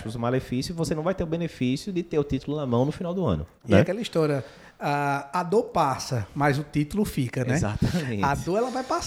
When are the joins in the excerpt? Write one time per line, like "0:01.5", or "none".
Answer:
none